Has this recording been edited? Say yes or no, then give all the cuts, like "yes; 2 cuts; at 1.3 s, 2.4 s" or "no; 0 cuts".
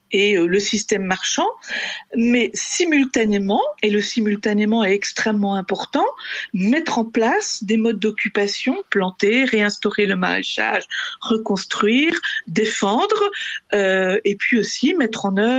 yes; 1 cut; at 3.8 s